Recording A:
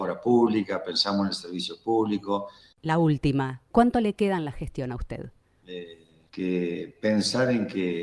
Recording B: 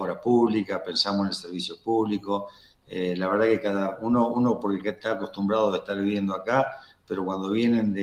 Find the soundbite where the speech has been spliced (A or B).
A